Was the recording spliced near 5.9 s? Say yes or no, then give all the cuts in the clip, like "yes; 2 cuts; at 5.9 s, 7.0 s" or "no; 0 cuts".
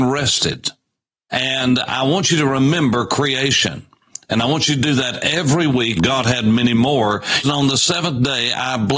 yes; 2 cuts; at 5.9 s, 7.4 s